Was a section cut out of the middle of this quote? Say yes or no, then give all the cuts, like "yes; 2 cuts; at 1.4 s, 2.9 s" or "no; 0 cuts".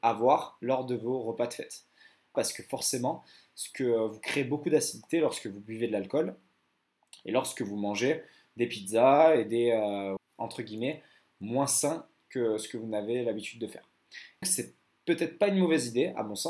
yes; 3 cuts; at 2.3 s, 10.2 s, 14.4 s